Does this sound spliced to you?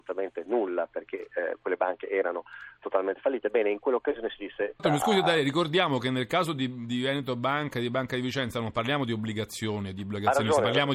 yes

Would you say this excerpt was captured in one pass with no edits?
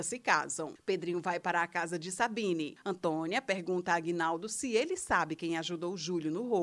yes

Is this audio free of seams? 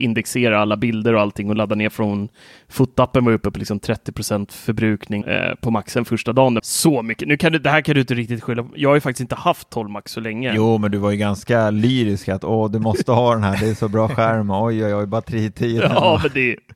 no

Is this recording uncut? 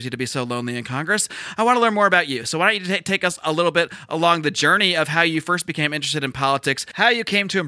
yes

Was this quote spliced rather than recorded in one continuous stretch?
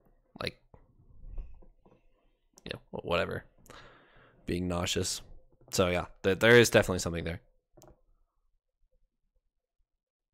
no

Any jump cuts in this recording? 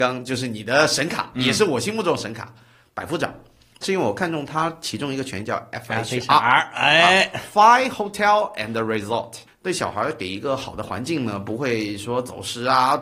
yes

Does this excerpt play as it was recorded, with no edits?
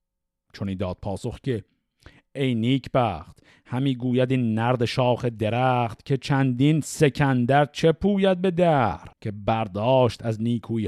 no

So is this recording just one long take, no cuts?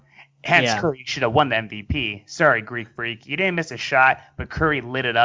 yes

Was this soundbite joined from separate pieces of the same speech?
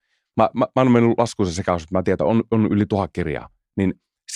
no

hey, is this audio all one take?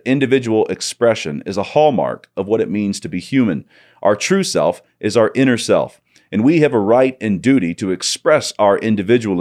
yes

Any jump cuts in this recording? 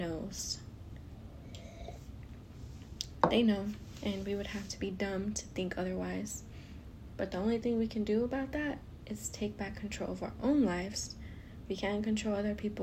no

